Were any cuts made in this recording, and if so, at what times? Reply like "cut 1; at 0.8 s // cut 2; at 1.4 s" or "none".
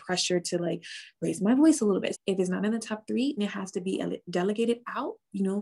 cut 1; at 2.1 s // cut 2; at 3.4 s